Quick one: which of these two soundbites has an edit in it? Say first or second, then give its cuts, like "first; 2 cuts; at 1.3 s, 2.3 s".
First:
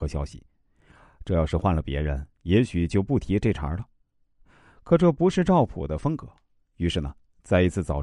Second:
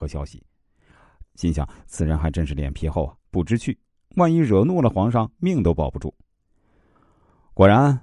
second; 2 cuts; at 1.2 s, 3.3 s